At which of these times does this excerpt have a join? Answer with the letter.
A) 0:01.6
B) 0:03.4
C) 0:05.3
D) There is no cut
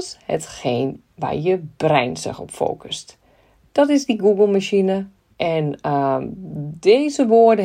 C